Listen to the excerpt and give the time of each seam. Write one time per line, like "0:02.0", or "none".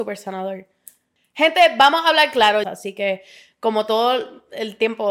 0:02.6